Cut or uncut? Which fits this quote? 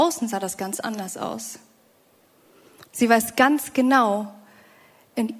cut